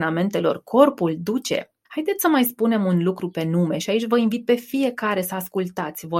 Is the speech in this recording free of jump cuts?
yes; 0 cuts

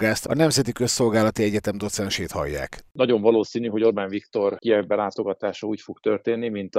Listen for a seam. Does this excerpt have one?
no; 0 cuts

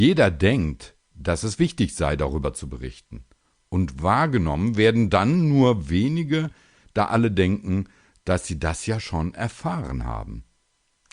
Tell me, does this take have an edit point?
no; 0 cuts

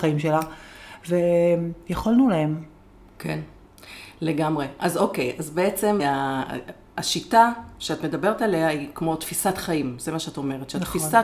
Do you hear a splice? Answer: yes; 1 cut; at 6.0 s

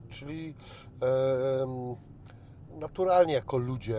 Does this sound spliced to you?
yes; 1 cut; at 2.7 s

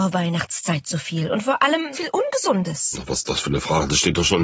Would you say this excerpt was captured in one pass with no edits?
no; 1 cut; at 1.9 s

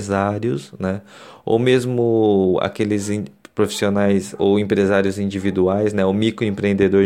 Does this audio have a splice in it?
no; 0 cuts

